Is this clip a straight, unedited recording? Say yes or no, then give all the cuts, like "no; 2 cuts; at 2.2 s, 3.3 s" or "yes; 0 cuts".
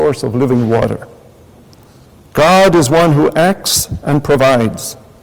no; 1 cut; at 2.2 s